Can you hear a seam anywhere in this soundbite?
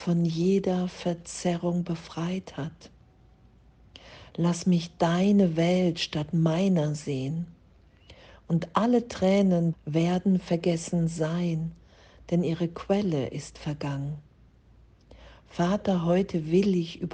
yes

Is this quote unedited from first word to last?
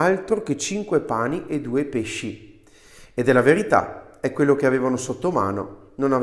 yes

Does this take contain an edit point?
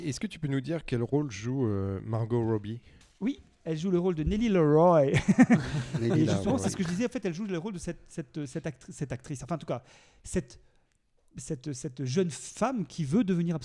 no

